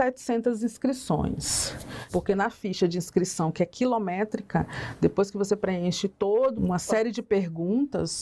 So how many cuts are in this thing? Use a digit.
2